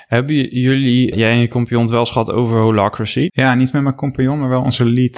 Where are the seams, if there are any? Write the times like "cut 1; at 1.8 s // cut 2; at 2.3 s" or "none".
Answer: cut 1; at 1.1 s // cut 2; at 3.3 s